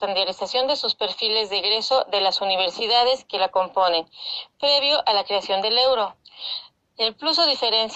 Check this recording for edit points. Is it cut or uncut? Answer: cut